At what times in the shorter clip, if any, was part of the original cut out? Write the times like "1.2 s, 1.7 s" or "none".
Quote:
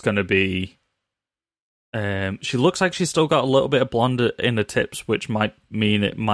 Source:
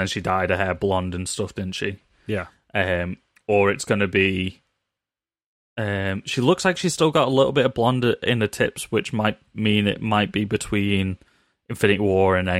none